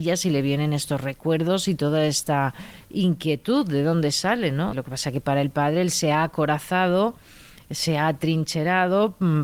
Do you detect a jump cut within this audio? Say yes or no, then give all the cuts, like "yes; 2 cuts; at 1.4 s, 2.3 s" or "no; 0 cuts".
yes; 1 cut; at 4.7 s